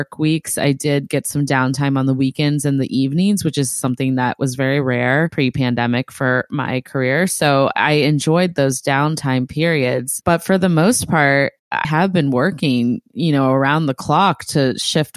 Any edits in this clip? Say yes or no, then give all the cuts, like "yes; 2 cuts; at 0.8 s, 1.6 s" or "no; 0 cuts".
yes; 1 cut; at 11.8 s